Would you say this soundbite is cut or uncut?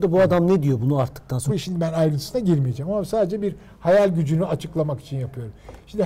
cut